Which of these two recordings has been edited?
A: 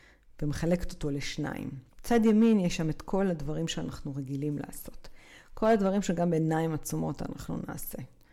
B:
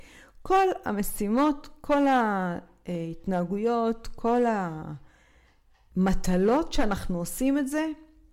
A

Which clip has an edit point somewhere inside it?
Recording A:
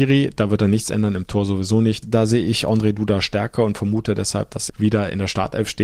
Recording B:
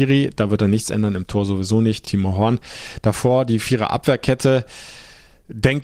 A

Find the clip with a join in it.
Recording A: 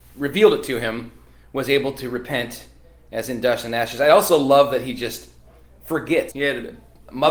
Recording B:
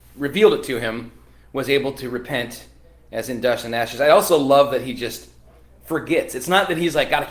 A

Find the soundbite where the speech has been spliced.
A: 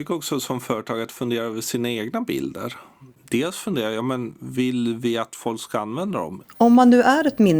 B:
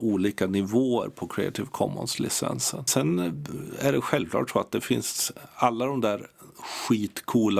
A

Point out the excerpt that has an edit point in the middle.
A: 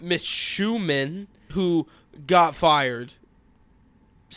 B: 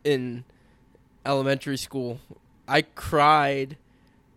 A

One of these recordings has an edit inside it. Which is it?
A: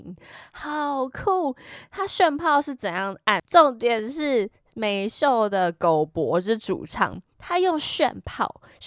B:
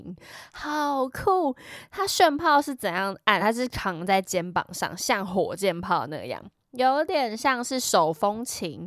A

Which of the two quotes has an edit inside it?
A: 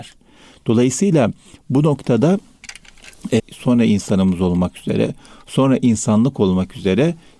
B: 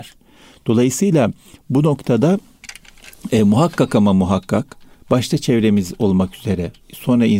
A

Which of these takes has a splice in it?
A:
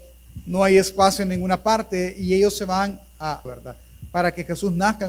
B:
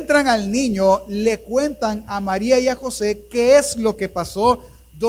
A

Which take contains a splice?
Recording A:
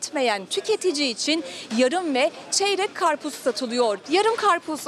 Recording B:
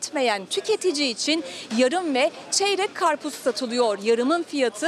A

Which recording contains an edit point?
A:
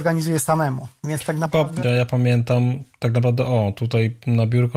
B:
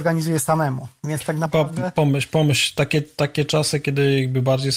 A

